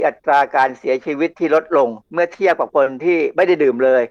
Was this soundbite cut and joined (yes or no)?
yes